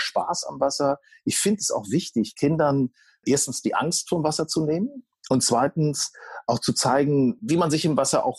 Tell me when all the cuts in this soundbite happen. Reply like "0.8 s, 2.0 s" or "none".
3.2 s, 7.4 s